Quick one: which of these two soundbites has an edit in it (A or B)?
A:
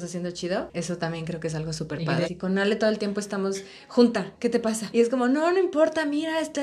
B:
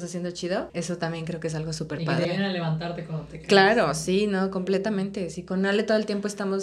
A